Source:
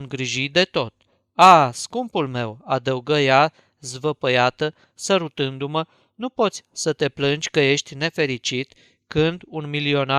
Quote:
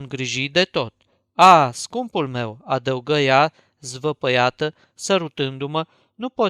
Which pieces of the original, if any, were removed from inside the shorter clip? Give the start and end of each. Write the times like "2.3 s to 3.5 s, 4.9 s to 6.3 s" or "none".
none